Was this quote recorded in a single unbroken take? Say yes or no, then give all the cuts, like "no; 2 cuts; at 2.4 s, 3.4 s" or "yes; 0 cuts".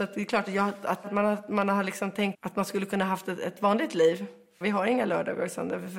no; 2 cuts; at 2.3 s, 4.6 s